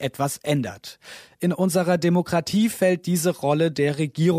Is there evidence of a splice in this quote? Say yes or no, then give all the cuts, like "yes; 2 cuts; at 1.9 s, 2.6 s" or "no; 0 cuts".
no; 0 cuts